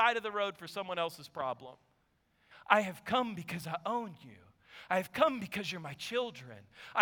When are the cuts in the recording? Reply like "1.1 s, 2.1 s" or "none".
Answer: 2.5 s